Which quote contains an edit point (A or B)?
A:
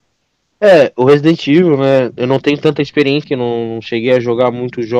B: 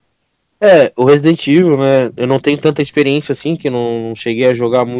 A